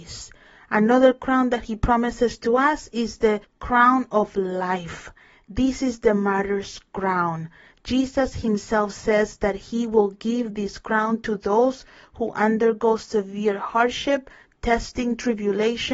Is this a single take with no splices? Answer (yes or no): yes